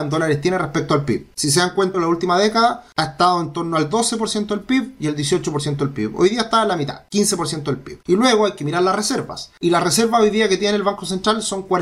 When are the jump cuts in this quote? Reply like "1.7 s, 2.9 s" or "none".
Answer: 1.9 s, 8.0 s